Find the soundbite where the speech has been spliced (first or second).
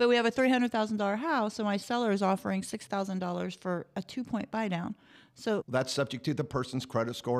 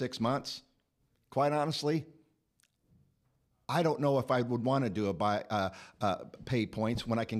first